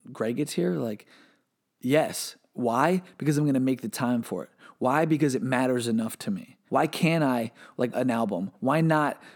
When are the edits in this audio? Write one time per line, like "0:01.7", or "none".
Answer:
0:06.7
0:07.9

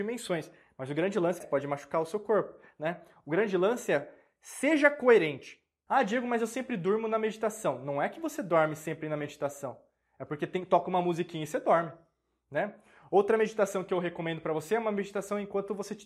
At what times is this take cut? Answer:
0:01.4
0:05.9

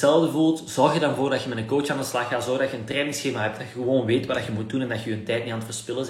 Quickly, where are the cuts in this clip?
none

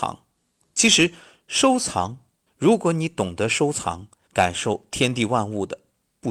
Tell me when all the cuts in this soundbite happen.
0:02.5
0:04.3

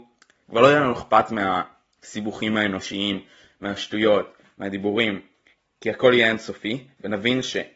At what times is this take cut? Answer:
0:04.4

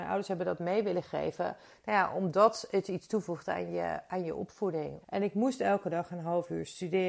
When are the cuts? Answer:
0:05.0

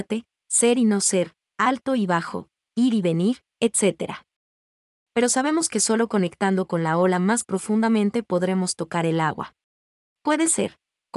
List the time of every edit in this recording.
0:10.0

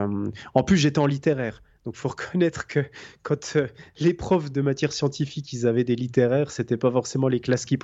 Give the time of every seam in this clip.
0:04.5

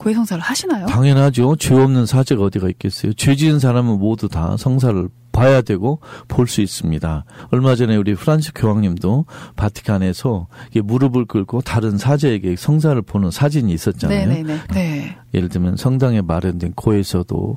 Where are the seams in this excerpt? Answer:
0:14.7

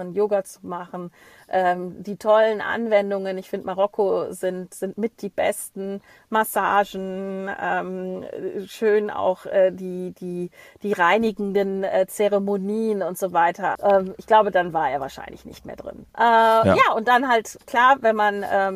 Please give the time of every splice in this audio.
0:13.7
0:16.1

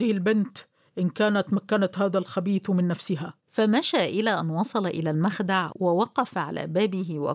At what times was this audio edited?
0:03.4

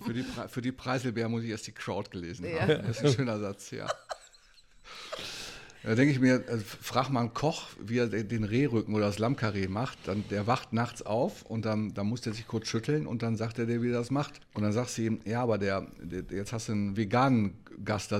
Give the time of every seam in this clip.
0:14.4

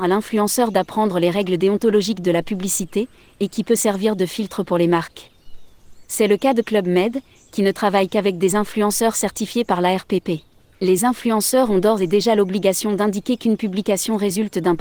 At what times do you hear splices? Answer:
0:10.7

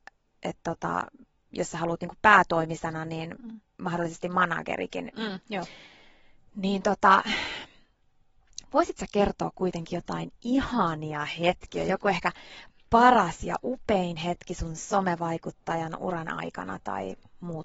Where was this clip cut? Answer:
0:05.4

